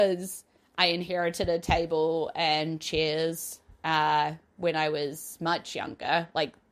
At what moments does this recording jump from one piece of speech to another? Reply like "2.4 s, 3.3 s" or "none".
none